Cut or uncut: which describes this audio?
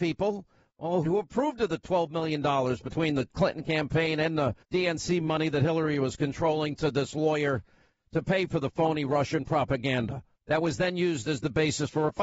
cut